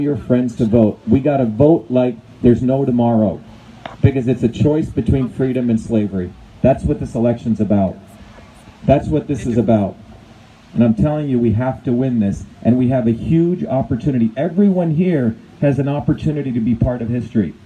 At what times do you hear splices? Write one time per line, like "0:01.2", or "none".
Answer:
none